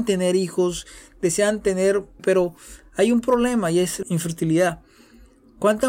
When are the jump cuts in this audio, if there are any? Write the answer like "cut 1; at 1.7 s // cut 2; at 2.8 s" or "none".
cut 1; at 2.2 s // cut 2; at 4.0 s